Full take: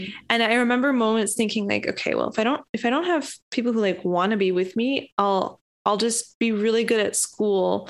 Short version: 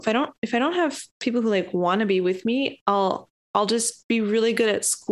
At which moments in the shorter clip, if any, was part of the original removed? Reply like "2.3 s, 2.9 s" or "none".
none